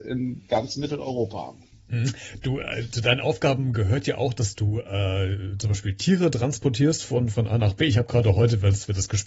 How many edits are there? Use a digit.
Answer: 0